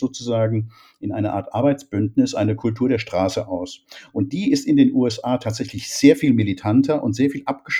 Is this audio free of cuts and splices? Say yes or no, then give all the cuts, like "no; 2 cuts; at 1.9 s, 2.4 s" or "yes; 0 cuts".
yes; 0 cuts